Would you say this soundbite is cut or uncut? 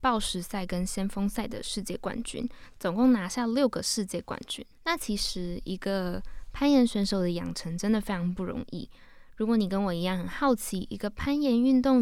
cut